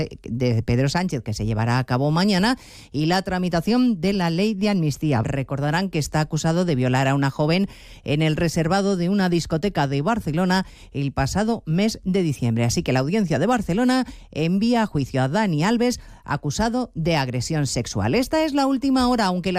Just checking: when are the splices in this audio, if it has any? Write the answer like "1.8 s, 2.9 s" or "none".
5.2 s

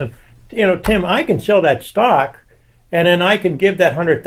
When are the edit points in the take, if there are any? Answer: none

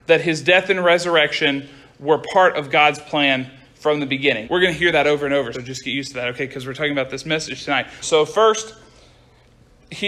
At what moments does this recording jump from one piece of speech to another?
4.4 s, 5.5 s, 8.0 s

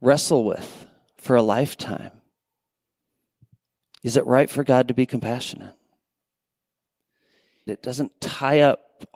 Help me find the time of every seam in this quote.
7.7 s

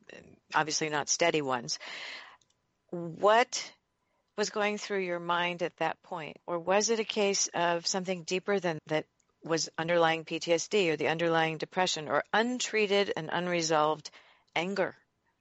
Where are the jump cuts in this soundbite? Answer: 6.4 s, 8.8 s

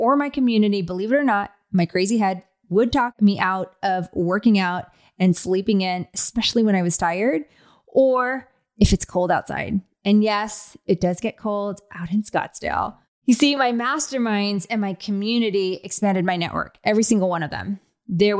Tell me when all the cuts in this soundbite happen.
none

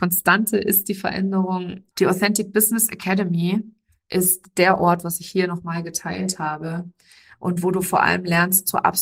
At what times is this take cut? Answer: 1.9 s, 5.0 s

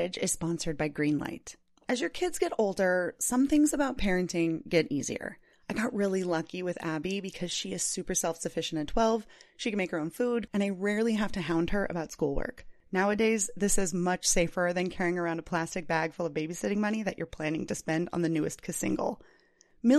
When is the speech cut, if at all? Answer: 10.5 s, 12.8 s

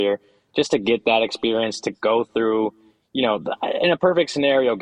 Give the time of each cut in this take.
none

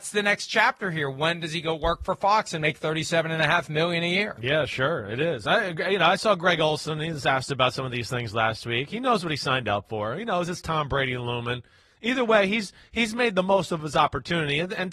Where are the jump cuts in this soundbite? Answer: none

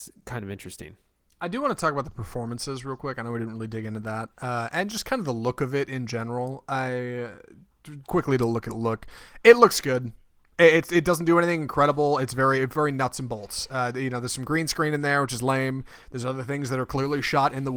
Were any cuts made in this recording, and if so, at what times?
8.0 s

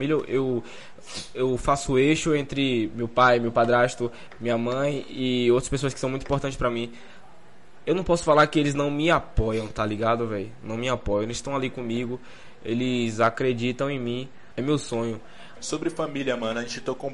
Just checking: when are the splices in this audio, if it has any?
14.5 s, 15.6 s

